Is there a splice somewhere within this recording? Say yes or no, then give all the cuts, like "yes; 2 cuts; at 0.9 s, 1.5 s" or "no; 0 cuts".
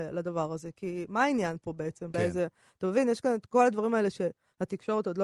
yes; 1 cut; at 2.1 s